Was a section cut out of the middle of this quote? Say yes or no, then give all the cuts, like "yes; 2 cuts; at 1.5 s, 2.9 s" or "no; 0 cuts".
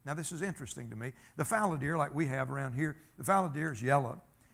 no; 0 cuts